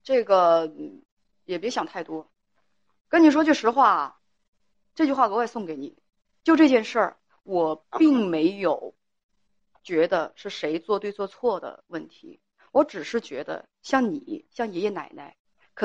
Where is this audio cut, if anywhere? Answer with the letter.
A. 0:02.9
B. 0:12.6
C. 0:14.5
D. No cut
D